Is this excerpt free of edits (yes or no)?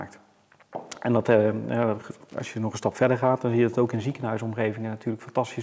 yes